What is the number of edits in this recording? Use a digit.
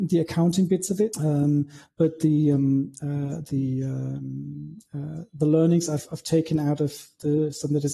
1